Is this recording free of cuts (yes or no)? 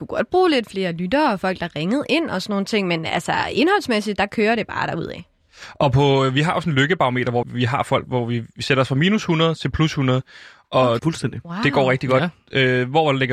no